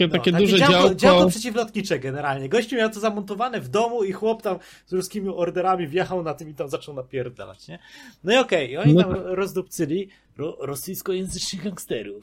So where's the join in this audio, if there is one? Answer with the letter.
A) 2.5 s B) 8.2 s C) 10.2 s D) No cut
C